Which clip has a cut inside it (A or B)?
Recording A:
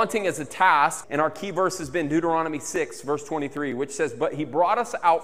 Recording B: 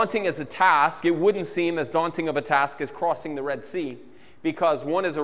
A